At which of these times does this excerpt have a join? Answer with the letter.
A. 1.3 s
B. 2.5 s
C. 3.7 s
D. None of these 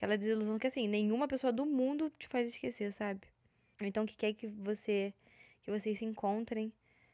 C